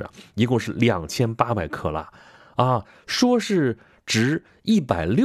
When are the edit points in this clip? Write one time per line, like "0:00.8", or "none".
0:02.9